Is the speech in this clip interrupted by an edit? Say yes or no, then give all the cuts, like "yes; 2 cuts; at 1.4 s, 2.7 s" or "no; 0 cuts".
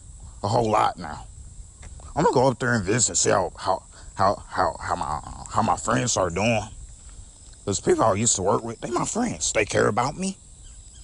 no; 0 cuts